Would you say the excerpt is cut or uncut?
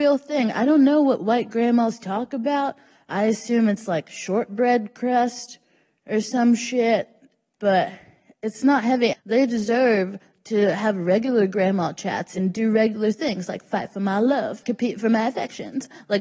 cut